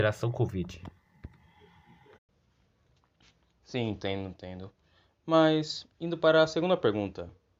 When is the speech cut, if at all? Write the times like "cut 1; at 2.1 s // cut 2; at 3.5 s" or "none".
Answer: cut 1; at 5.9 s